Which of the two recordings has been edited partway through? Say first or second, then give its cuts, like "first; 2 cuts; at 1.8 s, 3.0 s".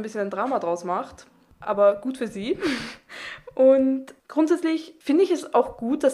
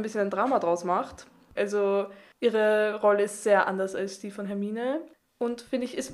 second; 1 cut; at 1.6 s